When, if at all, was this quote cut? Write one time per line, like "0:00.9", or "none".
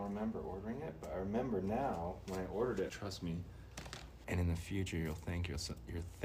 0:02.9
0:04.2